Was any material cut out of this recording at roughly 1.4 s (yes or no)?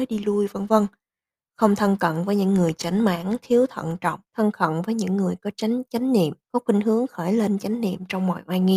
no